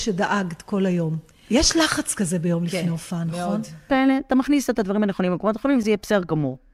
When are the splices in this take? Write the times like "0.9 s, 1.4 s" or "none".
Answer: 3.9 s, 5.8 s